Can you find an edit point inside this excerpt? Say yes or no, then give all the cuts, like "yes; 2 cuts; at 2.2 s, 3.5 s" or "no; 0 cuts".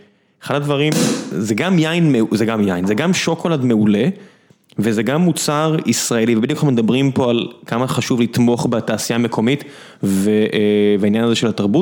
no; 0 cuts